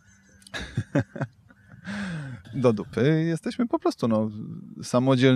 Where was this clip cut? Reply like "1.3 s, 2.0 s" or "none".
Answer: 2.4 s